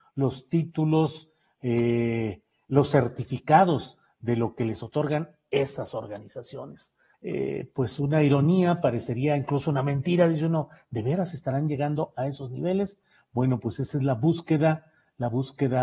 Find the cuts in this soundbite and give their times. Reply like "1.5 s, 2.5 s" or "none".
7.1 s

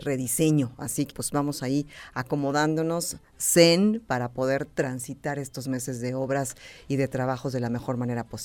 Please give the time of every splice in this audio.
1.1 s

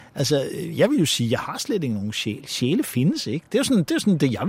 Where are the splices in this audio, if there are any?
none

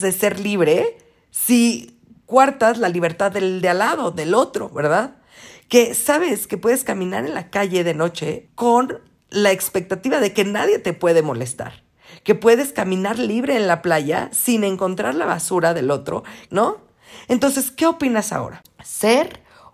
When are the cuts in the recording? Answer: 16.5 s

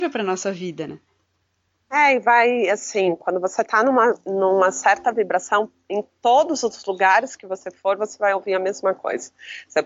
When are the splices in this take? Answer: none

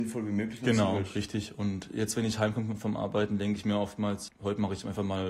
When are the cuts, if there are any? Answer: 4.3 s

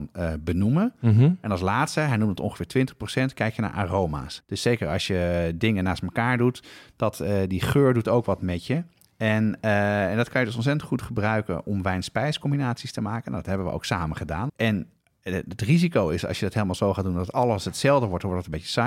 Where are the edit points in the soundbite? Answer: 4.4 s, 14.5 s

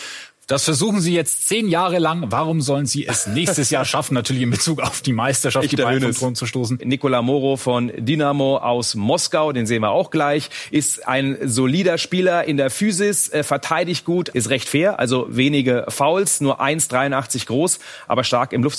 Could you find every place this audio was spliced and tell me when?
6.8 s, 14.3 s

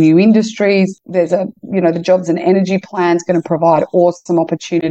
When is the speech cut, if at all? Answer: none

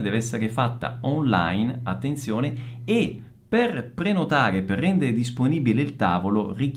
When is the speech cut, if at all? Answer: none

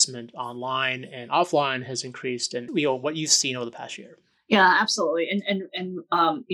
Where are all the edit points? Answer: 2.7 s

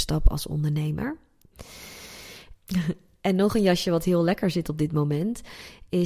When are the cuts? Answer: 2.6 s

